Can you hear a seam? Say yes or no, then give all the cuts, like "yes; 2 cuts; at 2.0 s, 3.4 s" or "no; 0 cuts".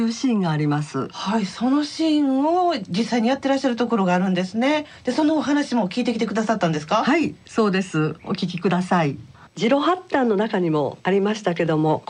no; 0 cuts